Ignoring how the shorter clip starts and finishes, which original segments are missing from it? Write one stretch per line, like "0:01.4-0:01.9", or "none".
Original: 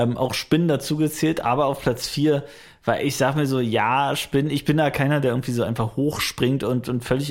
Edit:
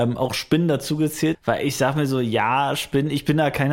0:01.3-0:02.7